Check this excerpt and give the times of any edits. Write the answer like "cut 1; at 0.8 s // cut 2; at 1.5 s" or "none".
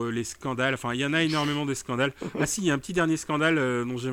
none